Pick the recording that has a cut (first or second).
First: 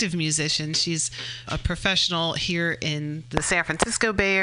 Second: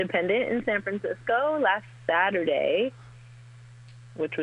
first